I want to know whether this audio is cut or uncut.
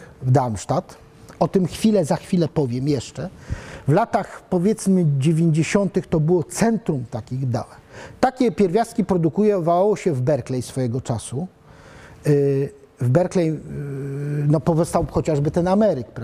uncut